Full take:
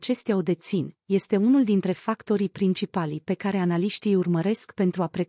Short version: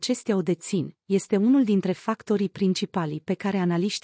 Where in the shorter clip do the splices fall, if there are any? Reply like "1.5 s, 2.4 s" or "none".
none